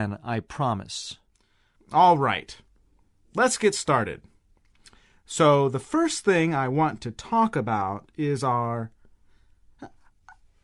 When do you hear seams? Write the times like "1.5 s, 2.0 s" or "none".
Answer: 1.8 s